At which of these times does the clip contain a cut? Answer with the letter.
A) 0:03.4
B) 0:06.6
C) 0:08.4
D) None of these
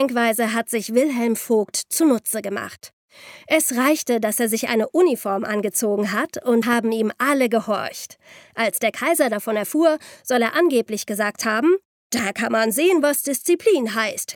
B